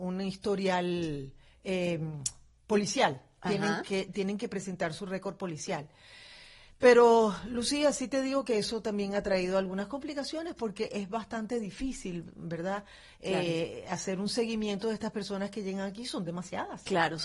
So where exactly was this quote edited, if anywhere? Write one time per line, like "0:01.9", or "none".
none